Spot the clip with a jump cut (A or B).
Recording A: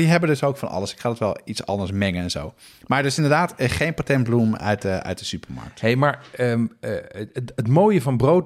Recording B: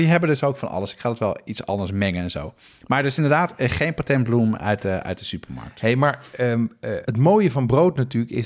B